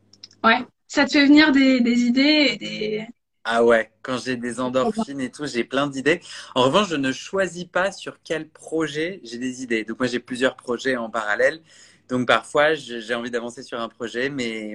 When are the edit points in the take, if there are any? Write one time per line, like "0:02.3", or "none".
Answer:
none

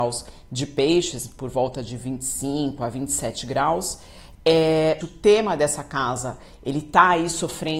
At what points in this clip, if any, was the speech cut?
0:05.0

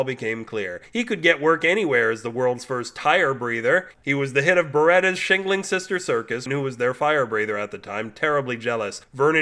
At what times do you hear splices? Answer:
0:03.9
0:06.5

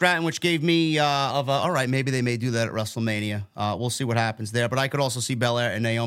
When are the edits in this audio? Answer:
0:01.3

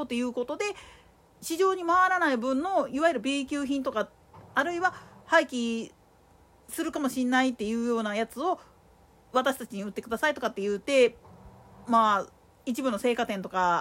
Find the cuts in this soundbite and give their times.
none

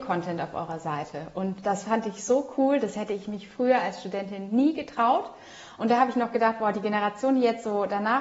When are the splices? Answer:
none

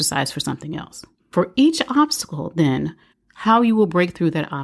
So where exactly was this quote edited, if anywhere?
0:01.2
0:03.1

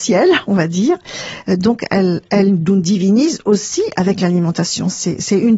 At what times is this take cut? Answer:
0:01.4

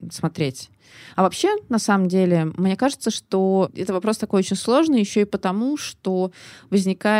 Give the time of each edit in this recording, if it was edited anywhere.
none

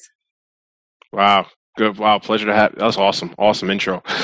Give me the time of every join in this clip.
none

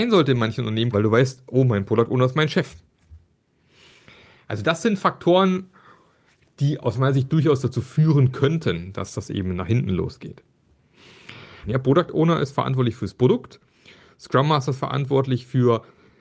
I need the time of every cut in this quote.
0:00.9
0:11.6

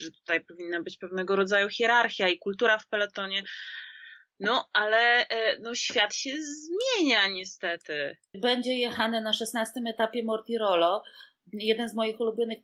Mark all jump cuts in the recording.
0:08.3

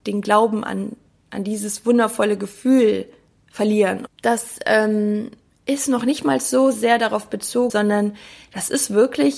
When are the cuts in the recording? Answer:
0:04.1
0:07.7

